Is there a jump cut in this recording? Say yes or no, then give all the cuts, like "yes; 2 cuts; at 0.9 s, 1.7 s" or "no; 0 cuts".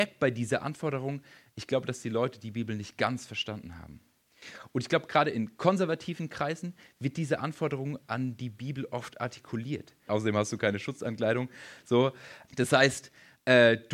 yes; 2 cuts; at 10.1 s, 12.5 s